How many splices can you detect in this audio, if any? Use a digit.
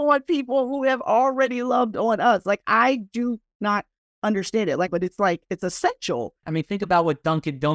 2